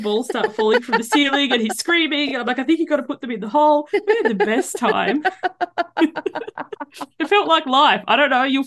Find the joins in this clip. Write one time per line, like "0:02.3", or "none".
none

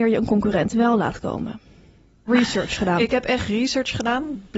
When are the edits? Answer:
0:02.3

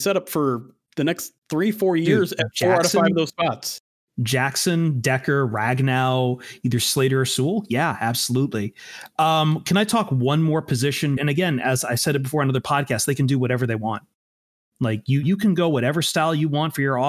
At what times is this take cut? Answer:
0:11.2
0:15.2

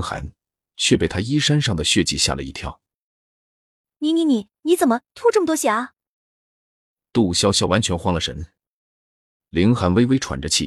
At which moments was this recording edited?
0:09.4

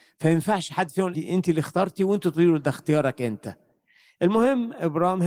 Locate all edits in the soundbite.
0:01.1

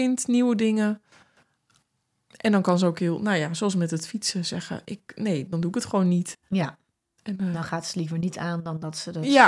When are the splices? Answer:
none

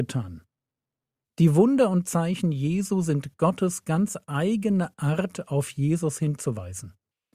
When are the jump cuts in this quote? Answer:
0:01.2

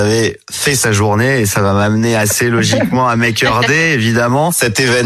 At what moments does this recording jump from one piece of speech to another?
none

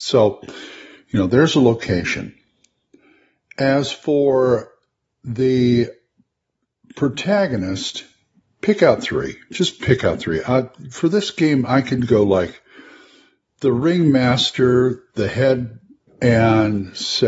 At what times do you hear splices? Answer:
0:16.1

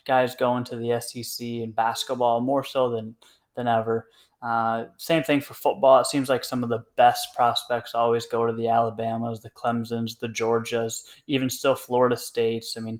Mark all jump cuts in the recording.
none

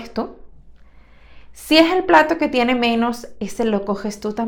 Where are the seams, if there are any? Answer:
none

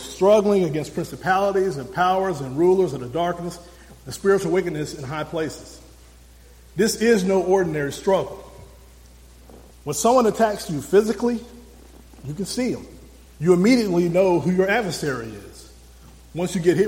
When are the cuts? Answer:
0:09.7
0:13.2

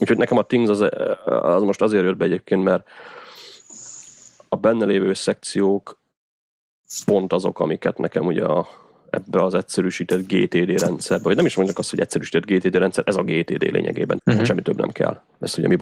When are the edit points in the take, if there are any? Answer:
0:14.2

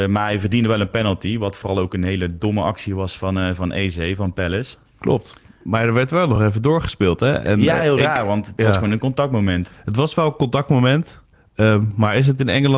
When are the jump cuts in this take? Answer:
none

